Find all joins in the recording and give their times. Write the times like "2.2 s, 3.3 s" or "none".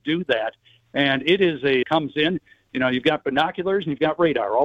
1.8 s

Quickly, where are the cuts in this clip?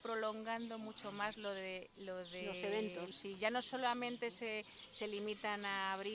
3.1 s

